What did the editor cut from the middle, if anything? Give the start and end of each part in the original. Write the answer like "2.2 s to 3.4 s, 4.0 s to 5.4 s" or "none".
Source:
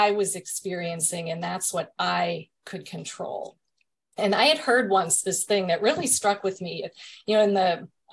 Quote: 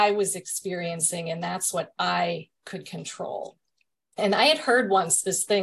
none